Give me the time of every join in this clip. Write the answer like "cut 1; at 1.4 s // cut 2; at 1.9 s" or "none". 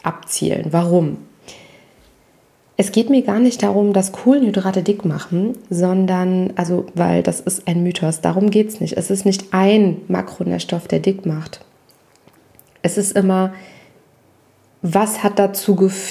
none